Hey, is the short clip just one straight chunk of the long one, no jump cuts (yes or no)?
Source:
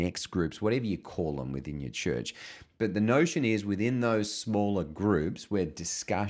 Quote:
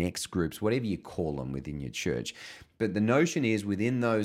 yes